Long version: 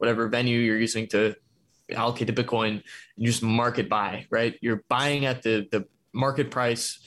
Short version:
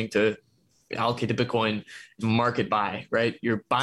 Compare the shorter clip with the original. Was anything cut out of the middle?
yes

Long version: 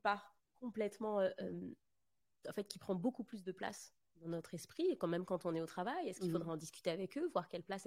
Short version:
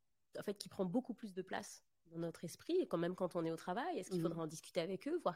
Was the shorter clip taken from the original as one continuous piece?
yes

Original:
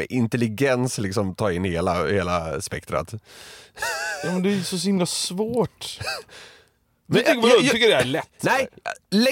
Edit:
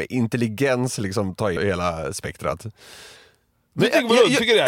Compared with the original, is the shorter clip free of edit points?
no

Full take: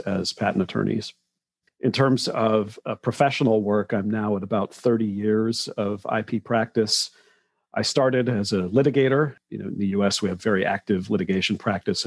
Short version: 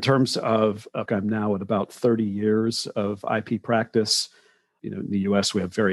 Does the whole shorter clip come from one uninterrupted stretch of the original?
no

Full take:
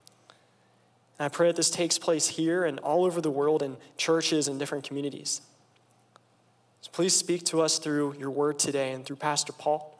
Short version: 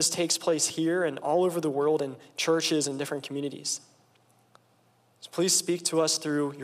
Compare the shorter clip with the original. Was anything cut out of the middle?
no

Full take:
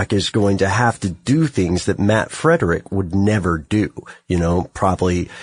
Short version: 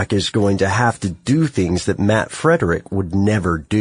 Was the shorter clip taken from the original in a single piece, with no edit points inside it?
yes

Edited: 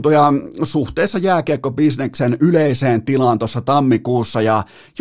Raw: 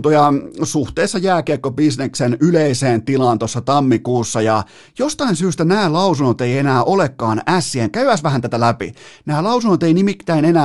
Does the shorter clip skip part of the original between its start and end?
no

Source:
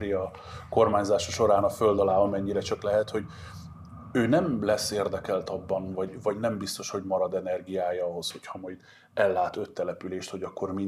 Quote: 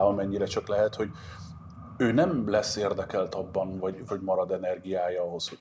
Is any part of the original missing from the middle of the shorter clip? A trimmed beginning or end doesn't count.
yes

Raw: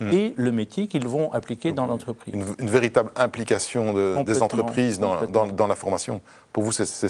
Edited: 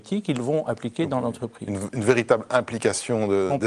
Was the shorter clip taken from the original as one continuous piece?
yes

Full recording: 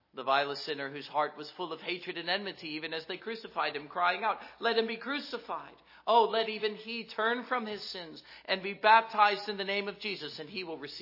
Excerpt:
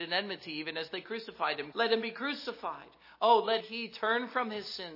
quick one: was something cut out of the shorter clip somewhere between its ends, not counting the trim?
yes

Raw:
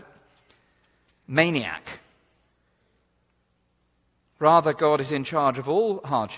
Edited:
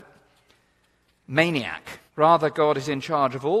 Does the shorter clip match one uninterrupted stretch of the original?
no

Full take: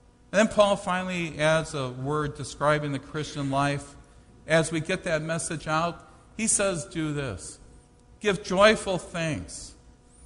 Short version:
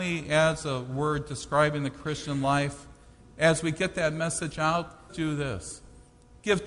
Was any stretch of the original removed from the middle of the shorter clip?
yes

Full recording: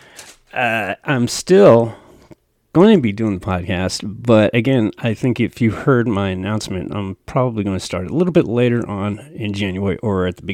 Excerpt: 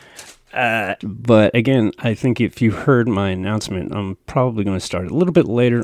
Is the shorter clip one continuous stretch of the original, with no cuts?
no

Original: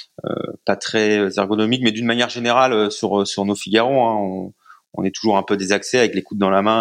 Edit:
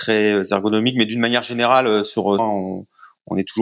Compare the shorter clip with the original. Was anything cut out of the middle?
yes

